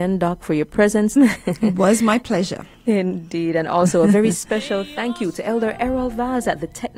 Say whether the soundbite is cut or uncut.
cut